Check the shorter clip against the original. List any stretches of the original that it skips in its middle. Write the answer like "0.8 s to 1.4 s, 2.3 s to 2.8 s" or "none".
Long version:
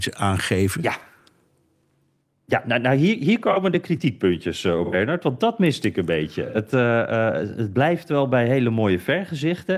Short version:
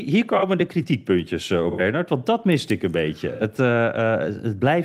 none